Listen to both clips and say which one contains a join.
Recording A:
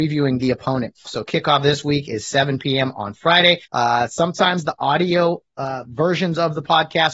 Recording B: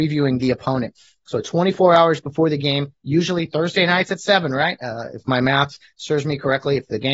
A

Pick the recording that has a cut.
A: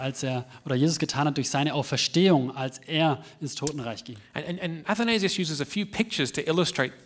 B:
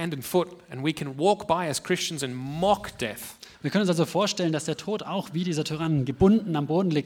A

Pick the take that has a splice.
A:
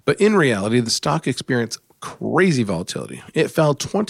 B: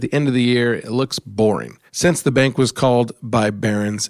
B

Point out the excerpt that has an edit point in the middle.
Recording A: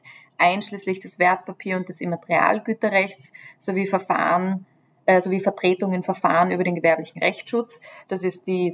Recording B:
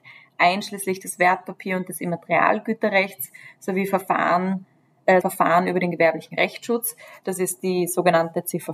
B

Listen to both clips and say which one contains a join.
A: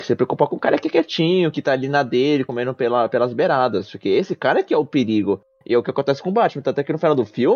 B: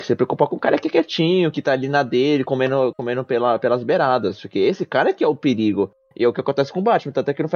A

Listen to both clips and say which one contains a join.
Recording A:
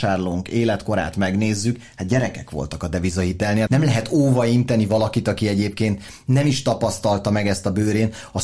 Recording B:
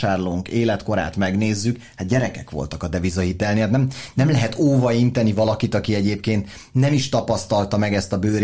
A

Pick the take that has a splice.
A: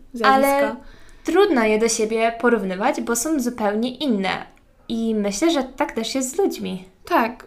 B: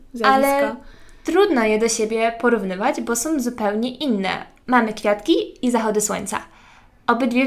B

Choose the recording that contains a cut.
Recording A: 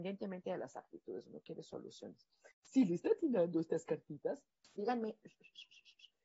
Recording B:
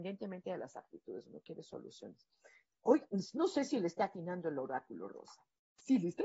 A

